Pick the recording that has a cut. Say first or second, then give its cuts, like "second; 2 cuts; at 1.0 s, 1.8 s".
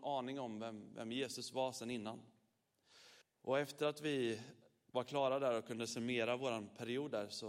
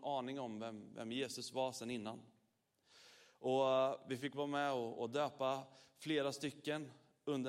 first; 1 cut; at 3.2 s